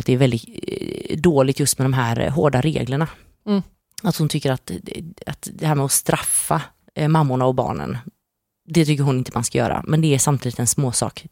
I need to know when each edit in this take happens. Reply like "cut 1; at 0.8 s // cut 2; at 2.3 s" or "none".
none